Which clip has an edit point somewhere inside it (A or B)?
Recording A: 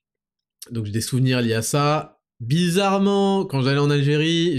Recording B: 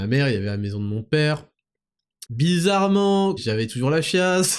B